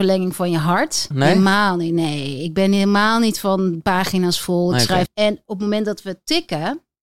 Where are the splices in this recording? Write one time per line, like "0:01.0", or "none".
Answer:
0:01.1
0:05.1